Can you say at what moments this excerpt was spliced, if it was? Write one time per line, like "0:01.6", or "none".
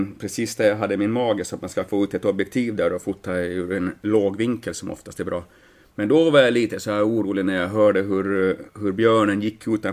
none